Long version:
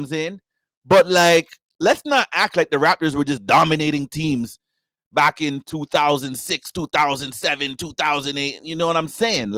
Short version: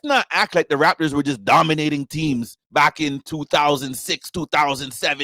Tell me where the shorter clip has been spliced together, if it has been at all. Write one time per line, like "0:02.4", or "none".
0:02.6